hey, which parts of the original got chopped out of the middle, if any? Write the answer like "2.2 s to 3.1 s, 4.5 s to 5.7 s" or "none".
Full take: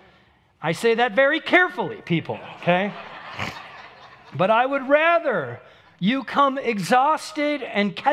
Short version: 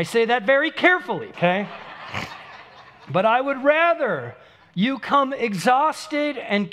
2.0 s to 2.6 s